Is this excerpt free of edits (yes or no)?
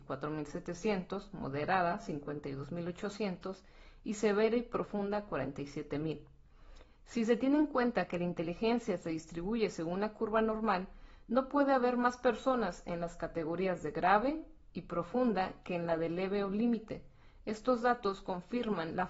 yes